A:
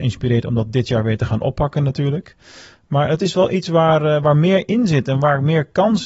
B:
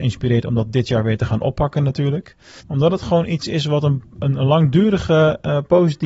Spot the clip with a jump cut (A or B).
B